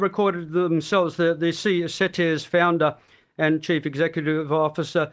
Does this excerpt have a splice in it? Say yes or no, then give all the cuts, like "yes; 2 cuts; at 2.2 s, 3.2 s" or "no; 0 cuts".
no; 0 cuts